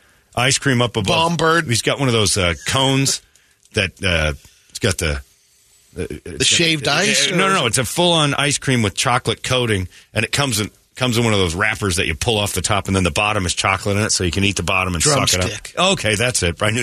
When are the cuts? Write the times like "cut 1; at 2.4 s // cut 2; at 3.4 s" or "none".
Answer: none

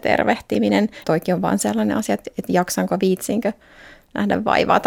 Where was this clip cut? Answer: cut 1; at 1.0 s

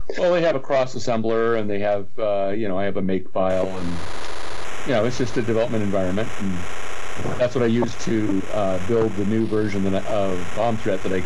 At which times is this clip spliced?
none

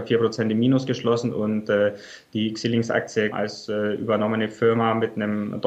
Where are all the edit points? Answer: cut 1; at 3.3 s

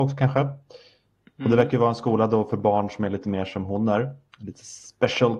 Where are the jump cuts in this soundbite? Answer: none

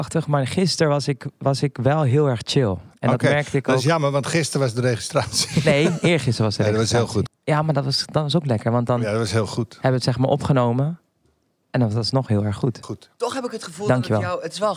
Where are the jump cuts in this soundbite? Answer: cut 1; at 7.3 s // cut 2; at 12.8 s

